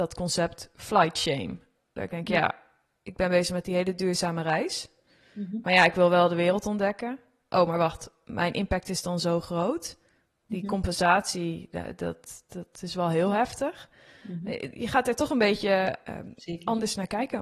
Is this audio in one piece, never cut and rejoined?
yes; 0 cuts

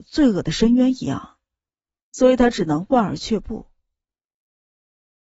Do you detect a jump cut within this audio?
no; 0 cuts

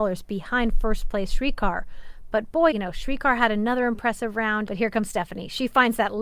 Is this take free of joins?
no; 2 cuts; at 2.7 s, 4.7 s

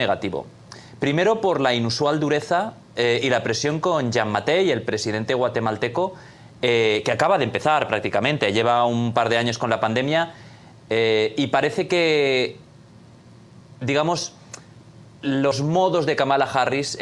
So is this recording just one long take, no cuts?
yes; 0 cuts

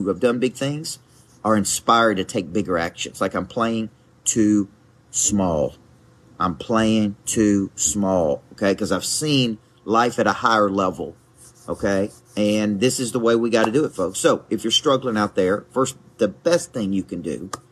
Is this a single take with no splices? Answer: yes; 0 cuts

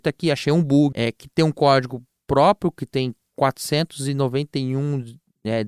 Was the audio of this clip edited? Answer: yes; 1 cut; at 0.9 s

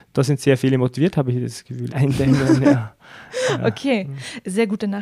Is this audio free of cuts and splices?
no; 1 cut; at 1.9 s

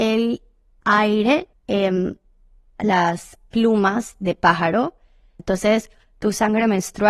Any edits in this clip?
yes; 2 cuts; at 1.5 s, 5.4 s

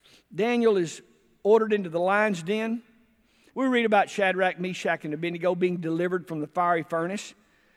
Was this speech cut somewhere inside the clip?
yes; 1 cut; at 3.5 s

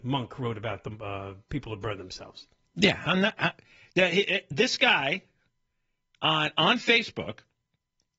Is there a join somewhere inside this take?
no; 0 cuts

